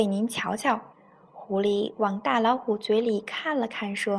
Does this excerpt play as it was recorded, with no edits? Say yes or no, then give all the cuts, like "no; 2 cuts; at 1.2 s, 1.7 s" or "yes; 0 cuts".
no; 1 cut; at 0.9 s